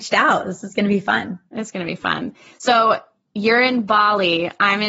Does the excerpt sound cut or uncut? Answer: uncut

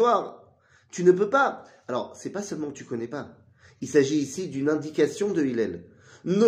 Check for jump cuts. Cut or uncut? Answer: uncut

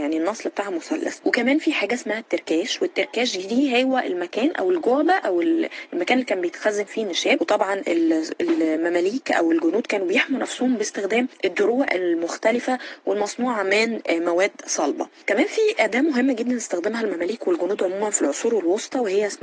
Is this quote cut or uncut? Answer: uncut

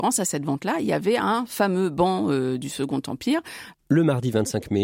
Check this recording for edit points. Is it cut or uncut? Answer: cut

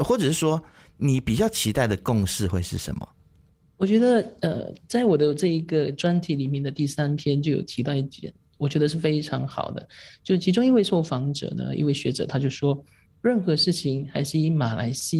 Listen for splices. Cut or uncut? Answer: uncut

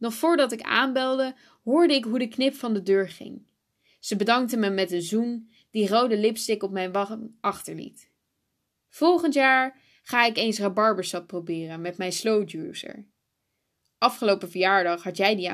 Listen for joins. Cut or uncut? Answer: cut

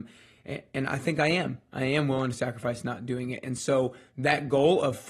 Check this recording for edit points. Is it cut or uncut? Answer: uncut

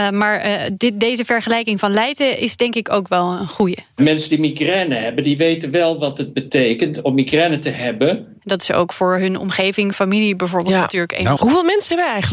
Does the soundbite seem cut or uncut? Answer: cut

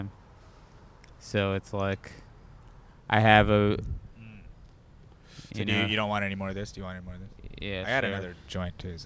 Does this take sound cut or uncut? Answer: cut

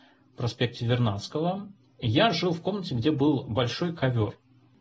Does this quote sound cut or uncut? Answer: uncut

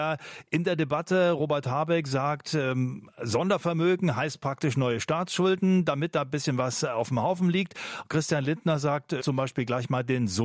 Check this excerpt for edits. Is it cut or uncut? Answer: cut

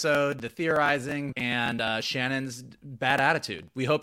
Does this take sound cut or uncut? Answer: cut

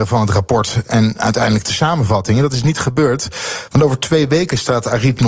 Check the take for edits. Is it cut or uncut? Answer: uncut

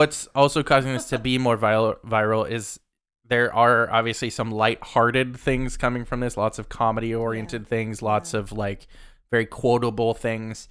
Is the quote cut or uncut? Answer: uncut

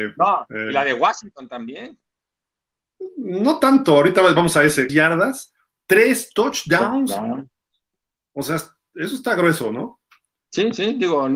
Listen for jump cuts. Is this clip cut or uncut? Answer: cut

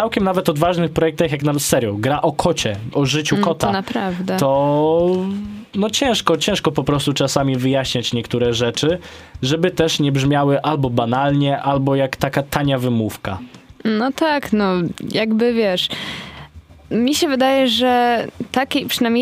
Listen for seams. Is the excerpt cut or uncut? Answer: uncut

